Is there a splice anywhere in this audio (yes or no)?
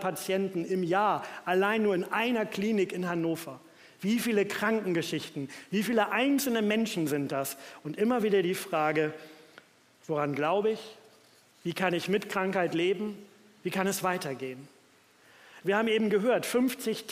yes